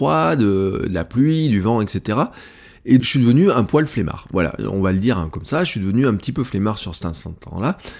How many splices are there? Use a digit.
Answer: 1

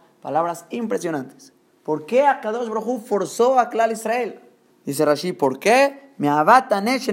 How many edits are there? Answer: 1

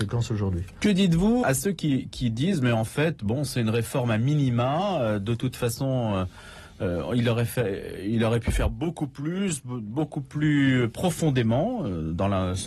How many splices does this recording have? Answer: 1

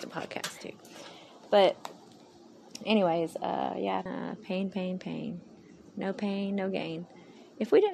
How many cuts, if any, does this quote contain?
1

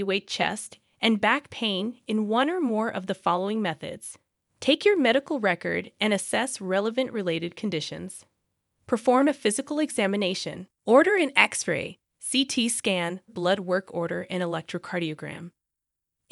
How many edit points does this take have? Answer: 2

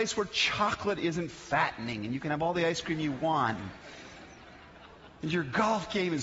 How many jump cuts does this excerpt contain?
0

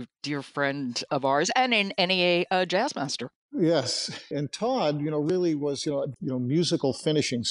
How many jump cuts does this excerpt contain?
2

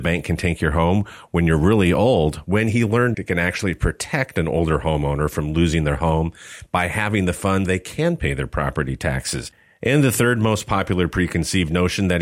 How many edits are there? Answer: 2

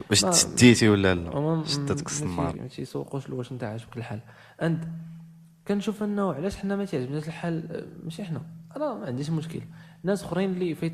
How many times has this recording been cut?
1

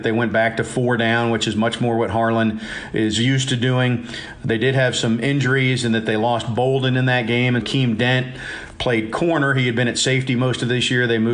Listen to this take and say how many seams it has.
1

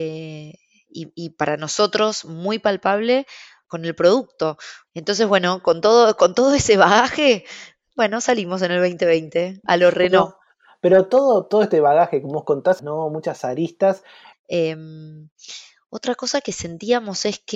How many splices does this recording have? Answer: 3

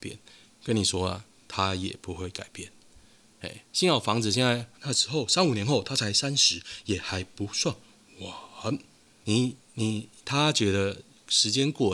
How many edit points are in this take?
2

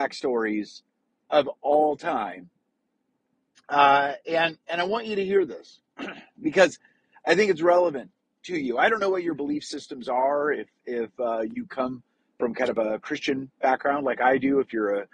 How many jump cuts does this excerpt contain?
0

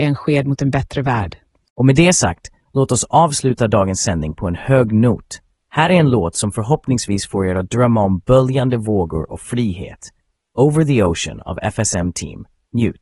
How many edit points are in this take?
0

